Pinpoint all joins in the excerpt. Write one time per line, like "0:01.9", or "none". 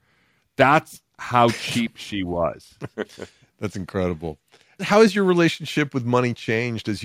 0:02.9